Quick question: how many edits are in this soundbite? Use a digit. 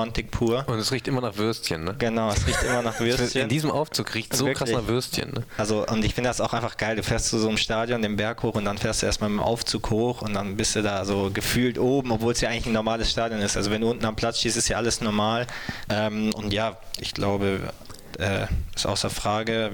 3